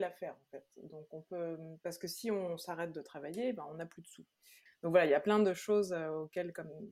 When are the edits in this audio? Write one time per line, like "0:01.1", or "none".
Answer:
0:04.7